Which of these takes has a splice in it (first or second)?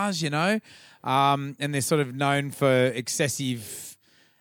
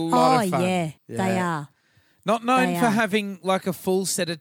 second